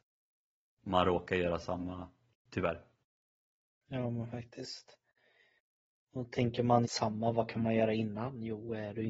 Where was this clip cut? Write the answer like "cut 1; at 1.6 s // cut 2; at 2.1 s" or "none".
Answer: cut 1; at 2.3 s // cut 2; at 6.8 s